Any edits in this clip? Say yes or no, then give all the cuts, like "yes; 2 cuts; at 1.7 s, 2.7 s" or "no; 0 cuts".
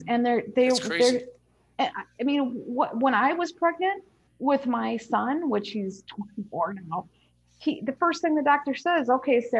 no; 0 cuts